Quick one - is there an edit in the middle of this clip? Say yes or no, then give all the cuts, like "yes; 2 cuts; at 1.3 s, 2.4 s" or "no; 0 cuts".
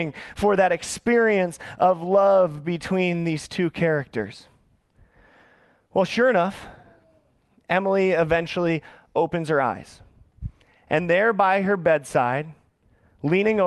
no; 0 cuts